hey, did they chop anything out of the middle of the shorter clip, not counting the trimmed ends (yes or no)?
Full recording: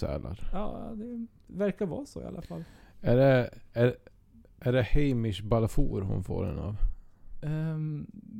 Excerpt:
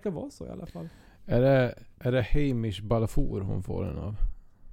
yes